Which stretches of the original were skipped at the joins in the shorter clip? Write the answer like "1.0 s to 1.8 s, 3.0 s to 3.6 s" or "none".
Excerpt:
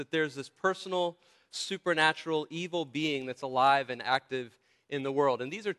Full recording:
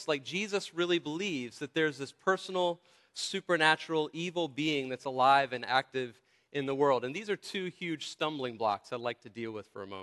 none